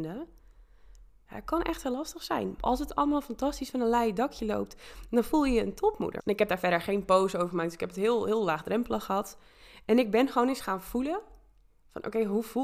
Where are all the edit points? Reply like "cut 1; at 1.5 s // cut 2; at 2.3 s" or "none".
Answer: cut 1; at 2.6 s // cut 2; at 6.2 s